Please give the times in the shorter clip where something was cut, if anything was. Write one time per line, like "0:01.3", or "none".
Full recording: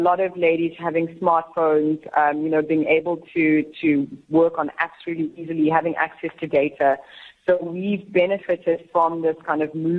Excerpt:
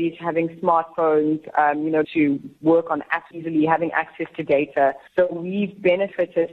0:02.0
0:03.3
0:05.1